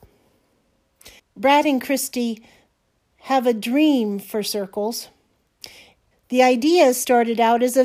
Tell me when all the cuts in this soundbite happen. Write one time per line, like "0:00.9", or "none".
0:01.2
0:06.1